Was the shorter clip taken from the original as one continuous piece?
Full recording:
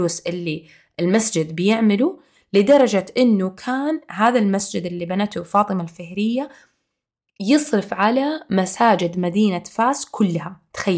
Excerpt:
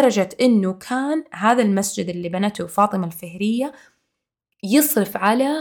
yes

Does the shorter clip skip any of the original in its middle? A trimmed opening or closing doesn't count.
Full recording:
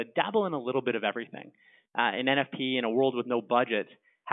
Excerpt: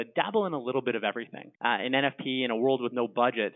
yes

